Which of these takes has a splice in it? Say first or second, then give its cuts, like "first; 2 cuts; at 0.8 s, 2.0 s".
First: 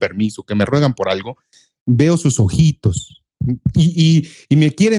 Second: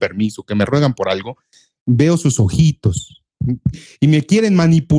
second; 1 cut; at 3.7 s